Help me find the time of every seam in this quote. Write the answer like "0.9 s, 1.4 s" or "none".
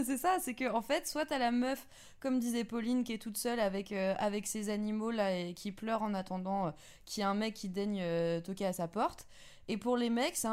8.4 s